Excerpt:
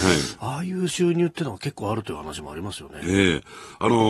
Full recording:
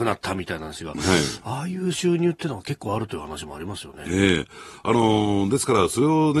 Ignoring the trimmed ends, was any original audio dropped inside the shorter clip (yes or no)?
no